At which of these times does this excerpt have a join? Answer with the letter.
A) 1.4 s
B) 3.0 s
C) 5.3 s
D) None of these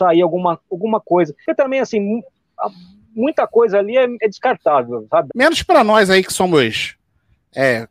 C